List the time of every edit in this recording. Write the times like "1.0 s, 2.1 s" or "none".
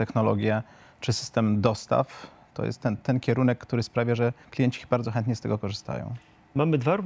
none

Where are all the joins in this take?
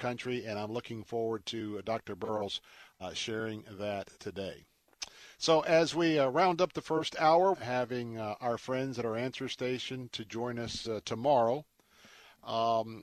7.5 s

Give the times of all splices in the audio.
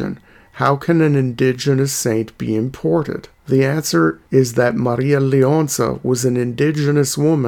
3.4 s

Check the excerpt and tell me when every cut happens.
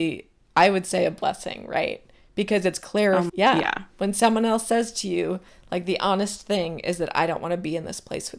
3.3 s

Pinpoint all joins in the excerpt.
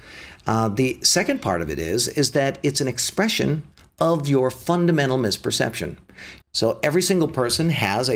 6.4 s

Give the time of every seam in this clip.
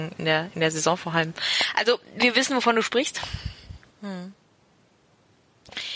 3.9 s

